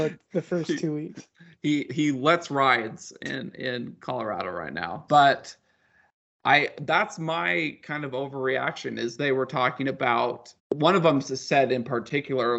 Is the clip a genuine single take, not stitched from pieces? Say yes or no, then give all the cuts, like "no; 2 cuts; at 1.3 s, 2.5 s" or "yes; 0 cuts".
no; 3 cuts; at 1.9 s, 5.1 s, 10.6 s